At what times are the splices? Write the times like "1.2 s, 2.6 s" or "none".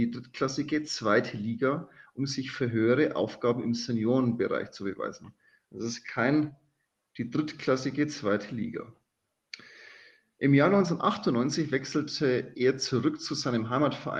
7.0 s